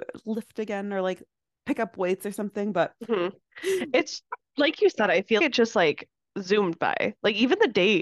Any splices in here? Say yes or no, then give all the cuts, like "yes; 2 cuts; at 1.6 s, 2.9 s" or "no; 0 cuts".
yes; 2 cuts; at 3.5 s, 5.4 s